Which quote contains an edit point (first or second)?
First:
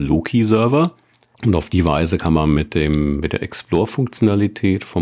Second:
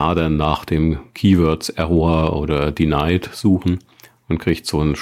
first